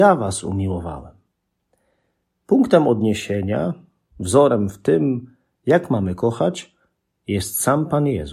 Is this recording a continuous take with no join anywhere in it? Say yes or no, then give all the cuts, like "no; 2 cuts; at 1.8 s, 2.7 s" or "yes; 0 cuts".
yes; 0 cuts